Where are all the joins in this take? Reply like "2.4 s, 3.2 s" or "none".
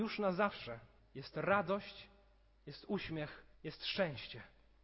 1.0 s, 3.5 s

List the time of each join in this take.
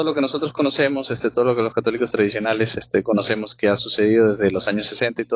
none

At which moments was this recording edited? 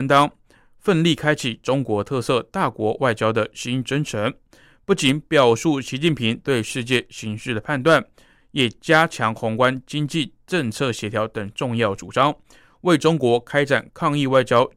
none

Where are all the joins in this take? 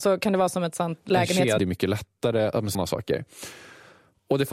1.6 s, 2.7 s

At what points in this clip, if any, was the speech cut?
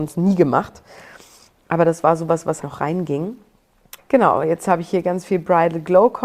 2.6 s, 4.0 s

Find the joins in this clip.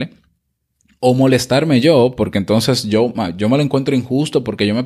none

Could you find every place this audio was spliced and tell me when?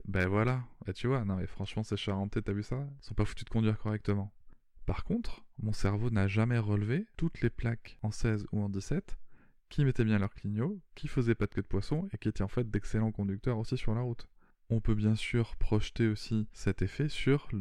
none

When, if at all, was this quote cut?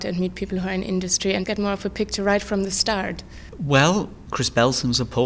1.4 s, 4.3 s

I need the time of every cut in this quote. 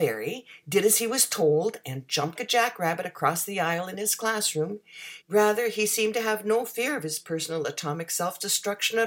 2.4 s, 5.2 s

